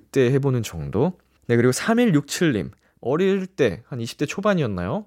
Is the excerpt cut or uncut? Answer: cut